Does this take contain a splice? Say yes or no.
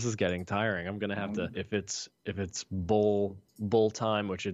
yes